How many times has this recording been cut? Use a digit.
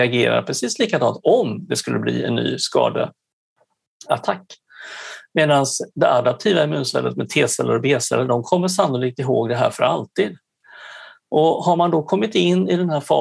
0